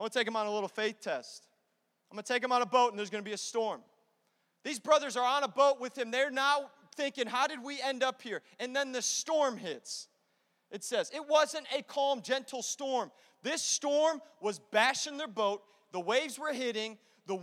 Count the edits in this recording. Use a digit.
0